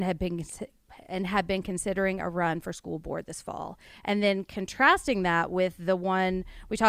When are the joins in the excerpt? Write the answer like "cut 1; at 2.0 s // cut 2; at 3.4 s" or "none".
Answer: none

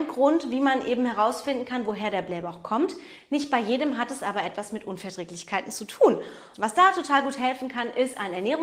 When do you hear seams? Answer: cut 1; at 6.5 s

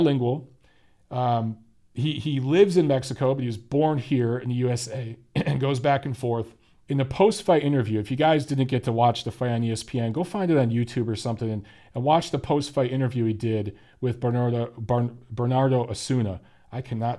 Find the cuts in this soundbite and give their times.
cut 1; at 6.8 s

